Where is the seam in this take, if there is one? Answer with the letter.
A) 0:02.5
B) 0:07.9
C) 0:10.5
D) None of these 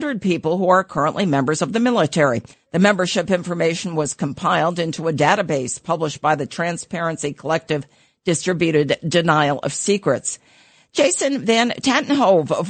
A